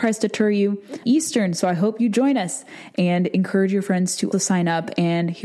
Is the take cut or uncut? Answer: cut